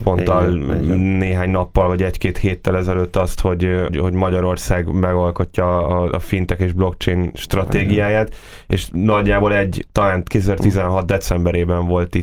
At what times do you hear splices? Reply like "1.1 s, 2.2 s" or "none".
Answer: 3.9 s, 9.9 s